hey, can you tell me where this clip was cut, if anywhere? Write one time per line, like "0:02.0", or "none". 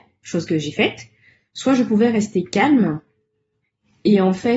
none